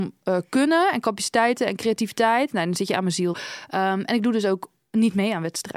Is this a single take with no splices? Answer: no; 1 cut; at 3.3 s

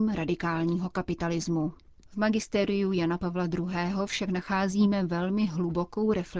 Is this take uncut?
no; 1 cut; at 1.9 s

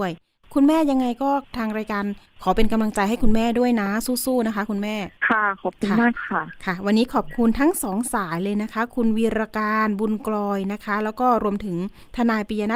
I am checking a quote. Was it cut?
yes; 1 cut; at 5.2 s

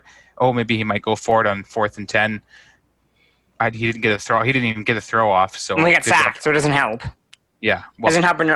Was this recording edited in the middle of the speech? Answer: no; 0 cuts

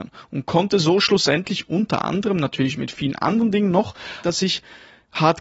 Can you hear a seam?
yes; 1 cut; at 4.2 s

